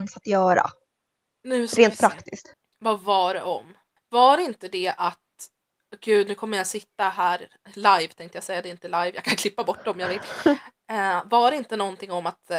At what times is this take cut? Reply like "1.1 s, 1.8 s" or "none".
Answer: none